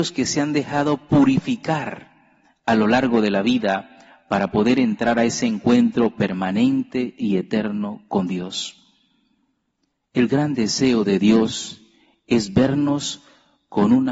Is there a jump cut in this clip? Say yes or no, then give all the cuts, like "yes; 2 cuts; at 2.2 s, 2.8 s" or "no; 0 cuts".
no; 0 cuts